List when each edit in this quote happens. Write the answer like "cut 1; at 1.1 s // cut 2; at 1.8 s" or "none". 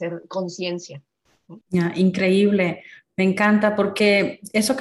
cut 1; at 1.6 s

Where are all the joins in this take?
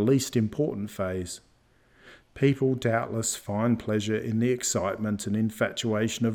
cut 1; at 2.2 s

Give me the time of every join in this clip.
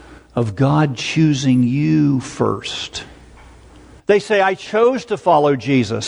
cut 1; at 4.0 s

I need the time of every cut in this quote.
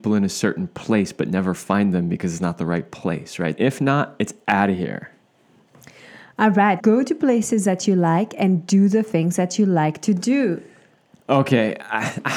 cut 1; at 3.6 s // cut 2; at 6.8 s

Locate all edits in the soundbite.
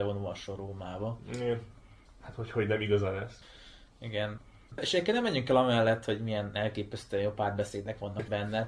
none

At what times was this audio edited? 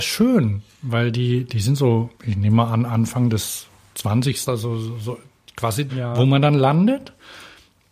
cut 1; at 2.1 s // cut 2; at 4.5 s // cut 3; at 5.9 s

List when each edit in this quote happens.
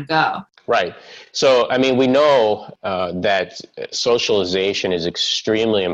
none

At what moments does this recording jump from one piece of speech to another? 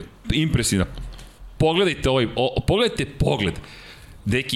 none

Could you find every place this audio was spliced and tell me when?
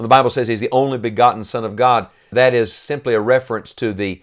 cut 1; at 2.3 s

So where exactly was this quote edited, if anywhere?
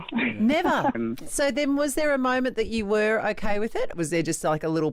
cut 1; at 0.9 s // cut 2; at 3.9 s

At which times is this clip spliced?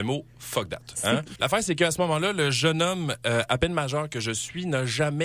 cut 1; at 1.4 s

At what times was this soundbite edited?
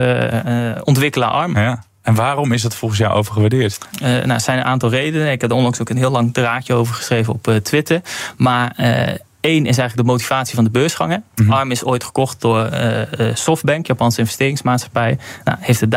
cut 1; at 3.9 s

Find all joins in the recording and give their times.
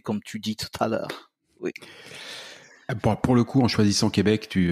none

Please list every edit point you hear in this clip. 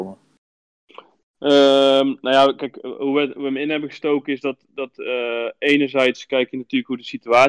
none

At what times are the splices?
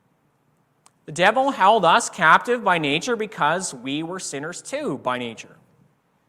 none

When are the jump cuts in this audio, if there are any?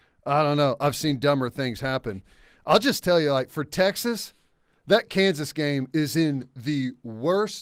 none

